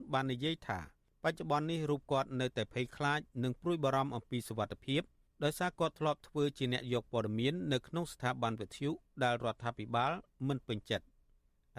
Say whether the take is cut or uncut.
uncut